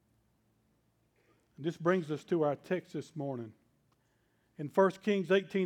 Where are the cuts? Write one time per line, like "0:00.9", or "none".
none